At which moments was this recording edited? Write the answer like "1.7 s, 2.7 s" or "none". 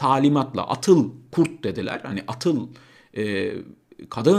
none

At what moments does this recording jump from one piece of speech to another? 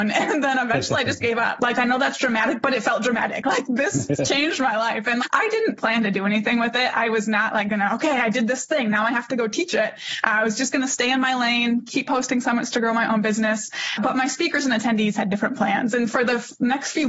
1.6 s

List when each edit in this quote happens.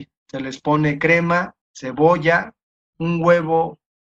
1.6 s

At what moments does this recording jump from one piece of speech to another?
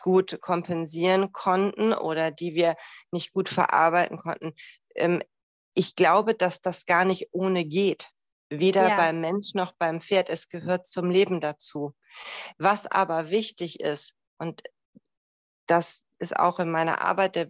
5.7 s

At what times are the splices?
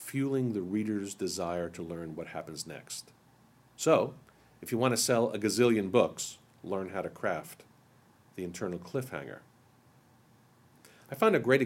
none

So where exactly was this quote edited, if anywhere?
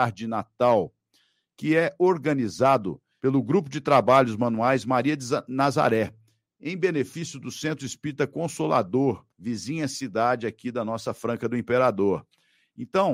9.3 s

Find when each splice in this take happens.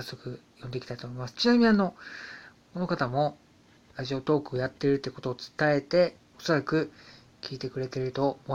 6.3 s

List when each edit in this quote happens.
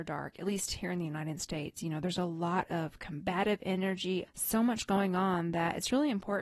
4.3 s

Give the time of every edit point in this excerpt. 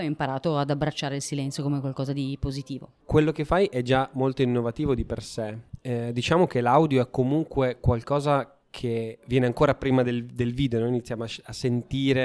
none

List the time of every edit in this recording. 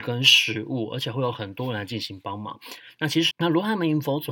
3.3 s

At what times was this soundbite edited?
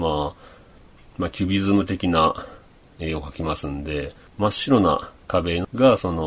none

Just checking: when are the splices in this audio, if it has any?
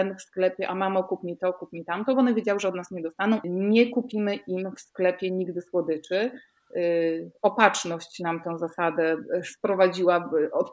3.4 s

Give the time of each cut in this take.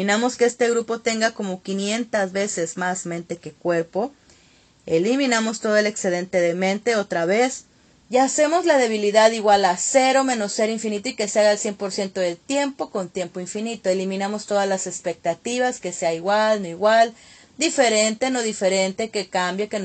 8.0 s

